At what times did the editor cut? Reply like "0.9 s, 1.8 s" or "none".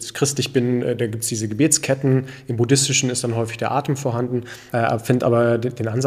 4.7 s